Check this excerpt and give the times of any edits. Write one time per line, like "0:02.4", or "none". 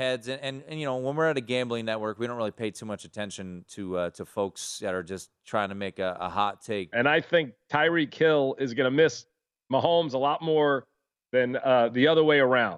0:06.9